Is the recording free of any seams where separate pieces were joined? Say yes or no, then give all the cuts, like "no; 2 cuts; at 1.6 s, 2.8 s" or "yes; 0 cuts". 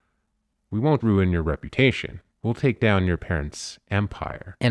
no; 2 cuts; at 1.0 s, 2.3 s